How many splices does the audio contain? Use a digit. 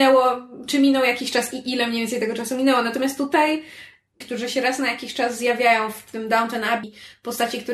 2